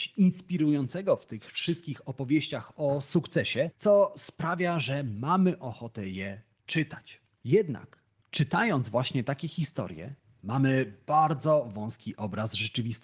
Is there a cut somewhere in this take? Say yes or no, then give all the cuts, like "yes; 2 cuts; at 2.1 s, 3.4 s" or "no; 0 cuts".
no; 0 cuts